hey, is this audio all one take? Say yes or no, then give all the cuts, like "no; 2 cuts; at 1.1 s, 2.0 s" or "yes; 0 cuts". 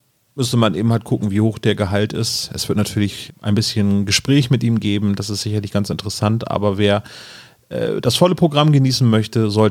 no; 1 cut; at 3.3 s